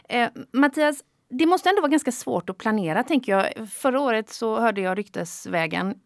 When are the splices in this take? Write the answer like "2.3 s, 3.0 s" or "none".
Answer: none